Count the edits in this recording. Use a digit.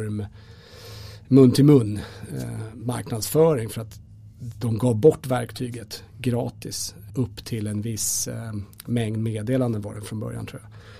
1